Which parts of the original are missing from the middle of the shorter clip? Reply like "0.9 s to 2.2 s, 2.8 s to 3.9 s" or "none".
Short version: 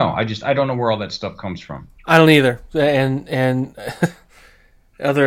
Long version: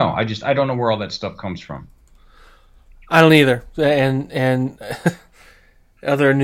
2.0 s to 3.0 s